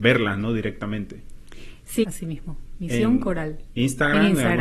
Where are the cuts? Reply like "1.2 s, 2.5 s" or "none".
2.0 s